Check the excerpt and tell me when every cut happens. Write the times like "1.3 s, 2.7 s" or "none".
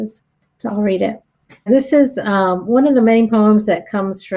1.7 s